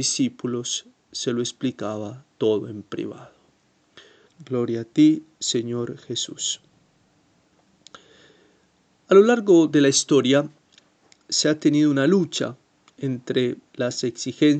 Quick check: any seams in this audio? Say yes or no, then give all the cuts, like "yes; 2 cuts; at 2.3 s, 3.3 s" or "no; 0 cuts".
yes; 1 cut; at 4.3 s